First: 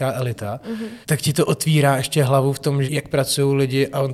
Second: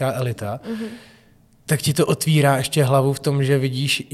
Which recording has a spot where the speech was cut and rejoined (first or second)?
first